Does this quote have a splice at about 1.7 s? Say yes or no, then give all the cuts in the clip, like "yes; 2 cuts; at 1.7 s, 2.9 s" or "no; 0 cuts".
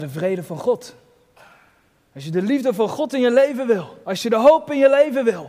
no; 1 cut; at 4.0 s